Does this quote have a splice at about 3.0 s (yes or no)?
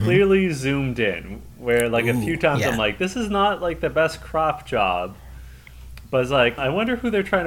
no